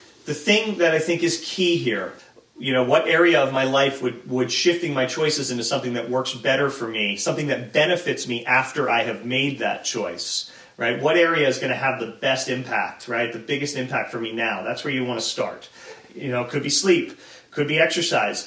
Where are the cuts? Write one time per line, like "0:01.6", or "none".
none